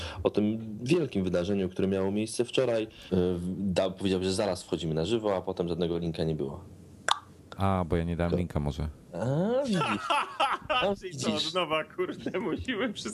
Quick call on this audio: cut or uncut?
cut